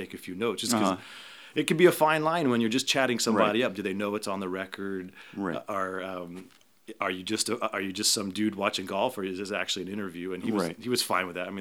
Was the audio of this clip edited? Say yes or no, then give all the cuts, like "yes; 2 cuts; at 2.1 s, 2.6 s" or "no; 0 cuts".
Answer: no; 0 cuts